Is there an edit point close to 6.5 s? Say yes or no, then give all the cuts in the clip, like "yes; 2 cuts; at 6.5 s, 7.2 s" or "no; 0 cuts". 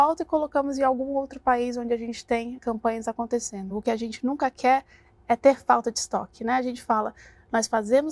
no; 2 cuts; at 2.6 s, 3.7 s